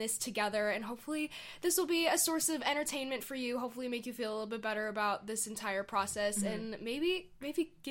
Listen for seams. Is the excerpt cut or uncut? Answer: uncut